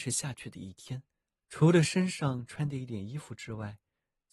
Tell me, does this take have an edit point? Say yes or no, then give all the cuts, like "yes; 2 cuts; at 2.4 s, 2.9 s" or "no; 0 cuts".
yes; 1 cut; at 1.4 s